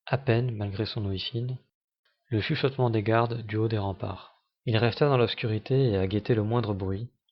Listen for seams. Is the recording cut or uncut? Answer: cut